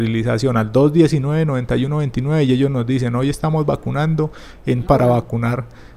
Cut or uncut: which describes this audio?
cut